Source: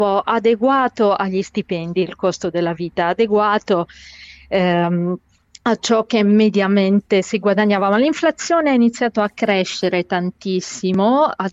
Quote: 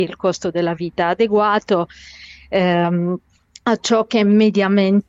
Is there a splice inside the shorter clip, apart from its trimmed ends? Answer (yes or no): no